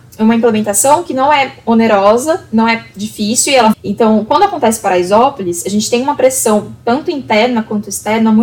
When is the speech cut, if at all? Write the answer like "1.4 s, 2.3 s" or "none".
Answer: 3.7 s